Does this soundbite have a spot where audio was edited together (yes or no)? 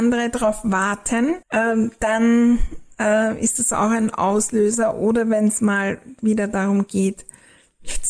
yes